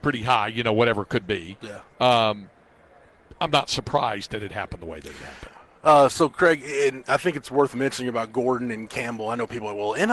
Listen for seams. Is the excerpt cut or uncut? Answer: uncut